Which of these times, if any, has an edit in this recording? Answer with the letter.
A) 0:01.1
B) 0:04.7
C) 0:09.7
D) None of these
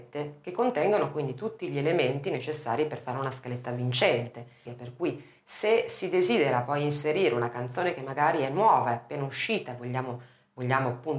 B